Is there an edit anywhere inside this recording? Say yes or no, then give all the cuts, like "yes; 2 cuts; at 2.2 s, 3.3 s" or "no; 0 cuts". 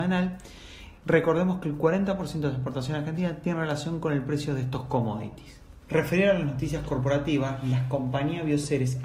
no; 0 cuts